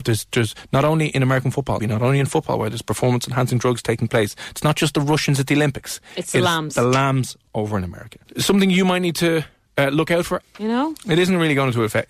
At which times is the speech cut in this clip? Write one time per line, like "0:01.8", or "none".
0:01.8
0:08.3
0:10.4